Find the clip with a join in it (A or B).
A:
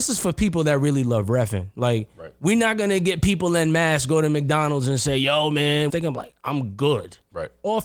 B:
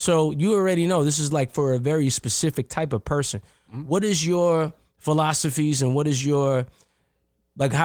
A